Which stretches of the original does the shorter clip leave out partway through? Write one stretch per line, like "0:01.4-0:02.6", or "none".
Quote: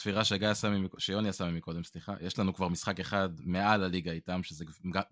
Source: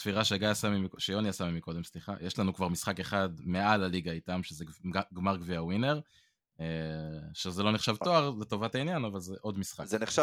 none